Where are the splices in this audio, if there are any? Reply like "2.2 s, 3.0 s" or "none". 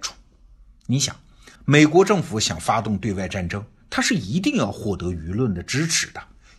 1.6 s

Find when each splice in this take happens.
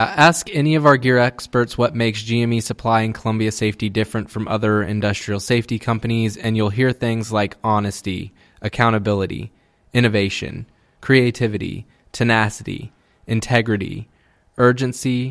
none

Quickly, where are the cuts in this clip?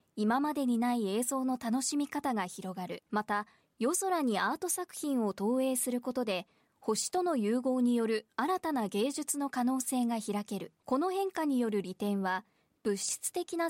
3.1 s, 10.8 s

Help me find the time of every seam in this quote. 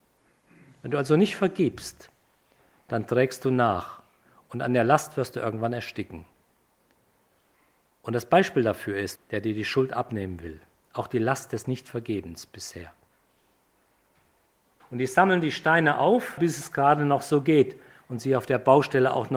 9.2 s, 14.8 s, 16.4 s

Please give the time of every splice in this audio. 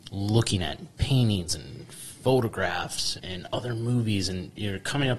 3.2 s

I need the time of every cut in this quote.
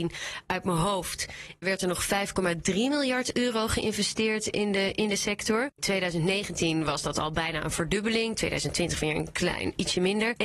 1.6 s

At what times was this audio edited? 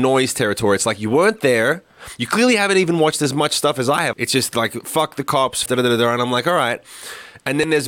4.1 s, 5.7 s

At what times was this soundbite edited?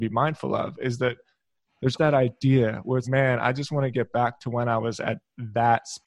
2.0 s, 3.0 s

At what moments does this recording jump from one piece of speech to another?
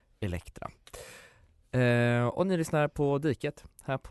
none

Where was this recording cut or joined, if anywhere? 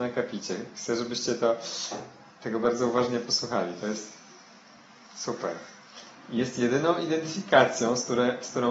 6.1 s

